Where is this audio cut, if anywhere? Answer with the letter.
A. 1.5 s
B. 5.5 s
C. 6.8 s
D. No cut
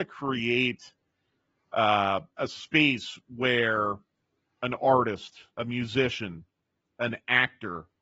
B